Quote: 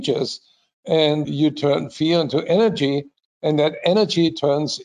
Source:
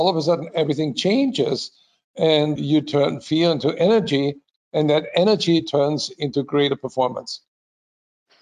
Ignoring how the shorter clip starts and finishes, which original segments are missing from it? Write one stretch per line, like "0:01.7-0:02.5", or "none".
none